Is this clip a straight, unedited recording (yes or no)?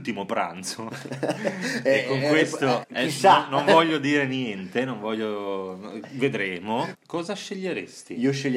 no